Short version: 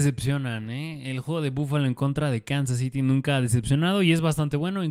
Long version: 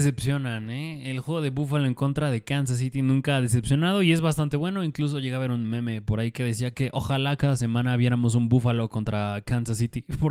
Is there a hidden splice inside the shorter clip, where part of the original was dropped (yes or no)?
no